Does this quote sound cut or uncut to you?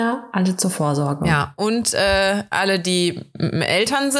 uncut